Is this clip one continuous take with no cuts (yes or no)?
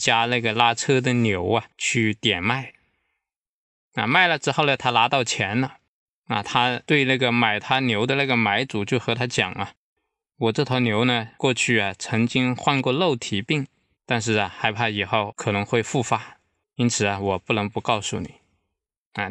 no